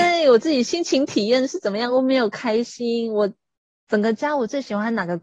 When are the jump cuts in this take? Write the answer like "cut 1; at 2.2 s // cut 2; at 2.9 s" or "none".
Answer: none